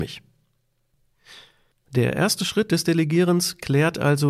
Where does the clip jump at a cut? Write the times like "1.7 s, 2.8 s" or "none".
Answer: none